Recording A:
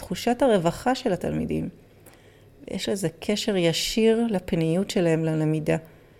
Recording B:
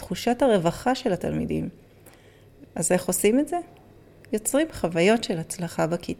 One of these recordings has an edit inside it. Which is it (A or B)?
B